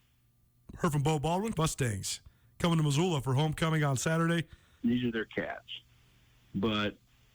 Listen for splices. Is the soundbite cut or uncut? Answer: cut